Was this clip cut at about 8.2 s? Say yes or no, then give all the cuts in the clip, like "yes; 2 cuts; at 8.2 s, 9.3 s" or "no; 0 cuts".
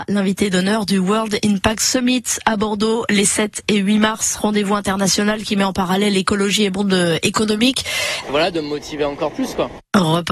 yes; 1 cut; at 8.2 s